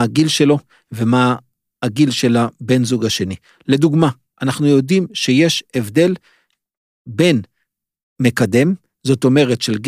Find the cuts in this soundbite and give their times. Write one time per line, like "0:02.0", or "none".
none